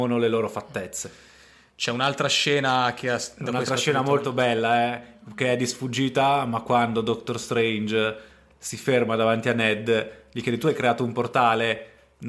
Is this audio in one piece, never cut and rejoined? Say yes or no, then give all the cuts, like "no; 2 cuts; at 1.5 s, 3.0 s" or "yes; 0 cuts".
yes; 0 cuts